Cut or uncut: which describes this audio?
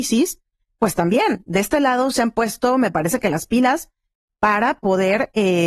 uncut